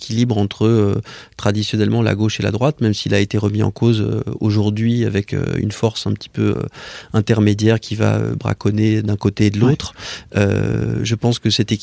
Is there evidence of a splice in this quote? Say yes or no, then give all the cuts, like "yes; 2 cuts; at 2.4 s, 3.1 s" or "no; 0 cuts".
no; 0 cuts